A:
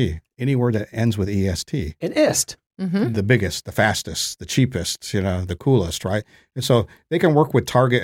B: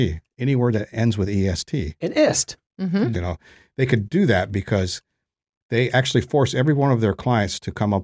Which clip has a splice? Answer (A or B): B